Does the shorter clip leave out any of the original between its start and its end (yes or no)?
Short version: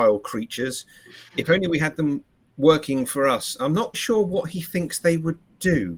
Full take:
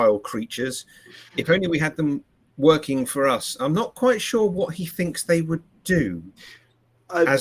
yes